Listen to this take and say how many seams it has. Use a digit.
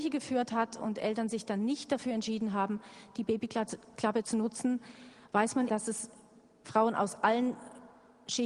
1